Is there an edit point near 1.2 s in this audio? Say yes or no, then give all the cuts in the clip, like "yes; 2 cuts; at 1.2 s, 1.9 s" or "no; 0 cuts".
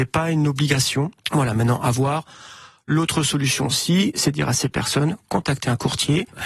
yes; 1 cut; at 1.2 s